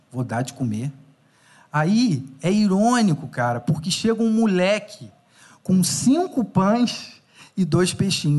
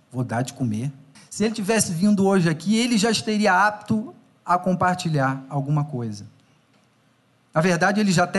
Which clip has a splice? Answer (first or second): second